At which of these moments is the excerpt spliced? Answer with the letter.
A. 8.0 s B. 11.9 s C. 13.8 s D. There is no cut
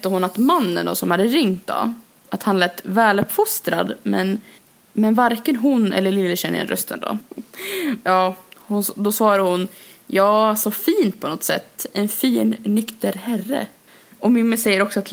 A